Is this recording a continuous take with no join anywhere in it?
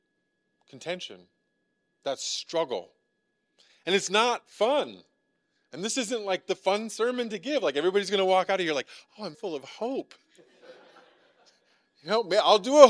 no; 1 cut; at 9.3 s

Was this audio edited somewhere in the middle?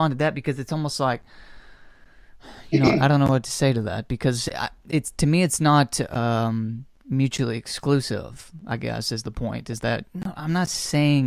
no; 0 cuts

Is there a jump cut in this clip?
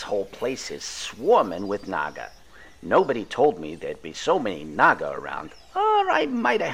no; 0 cuts

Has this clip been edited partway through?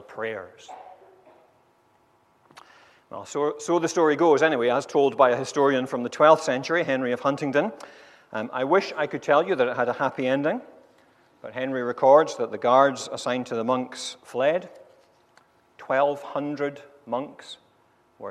no; 0 cuts

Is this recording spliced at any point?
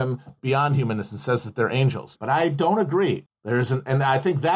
yes; 2 cuts; at 2.2 s, 3.3 s

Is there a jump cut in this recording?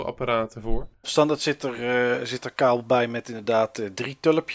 yes; 1 cut; at 1.0 s

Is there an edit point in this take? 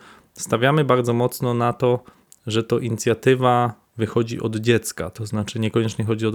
no; 0 cuts

